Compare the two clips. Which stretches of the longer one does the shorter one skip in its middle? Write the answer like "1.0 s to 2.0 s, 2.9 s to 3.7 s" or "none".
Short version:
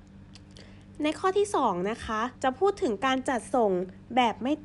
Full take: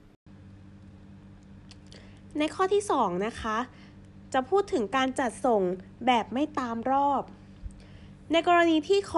3.7 s to 4.3 s